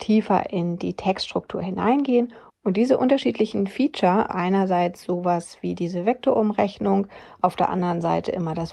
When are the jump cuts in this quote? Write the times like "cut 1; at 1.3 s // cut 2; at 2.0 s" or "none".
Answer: cut 1; at 2.5 s // cut 2; at 4.3 s